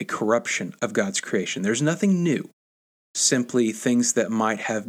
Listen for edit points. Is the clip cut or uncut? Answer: uncut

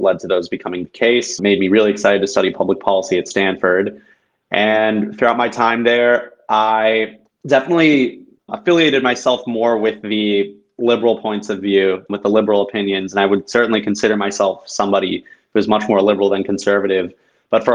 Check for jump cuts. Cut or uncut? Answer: cut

